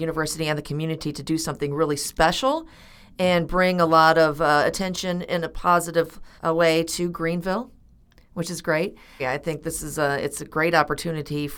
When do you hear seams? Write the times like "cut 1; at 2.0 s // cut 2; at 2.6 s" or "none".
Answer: cut 1; at 6.4 s // cut 2; at 9.2 s